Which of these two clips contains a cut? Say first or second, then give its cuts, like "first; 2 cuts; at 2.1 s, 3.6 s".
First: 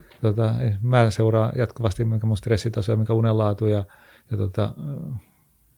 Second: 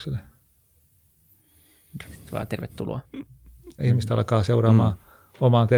second; 2 cuts; at 2.0 s, 3.8 s